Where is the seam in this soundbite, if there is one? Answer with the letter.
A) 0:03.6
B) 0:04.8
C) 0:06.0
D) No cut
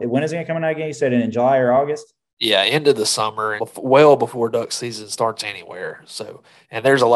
A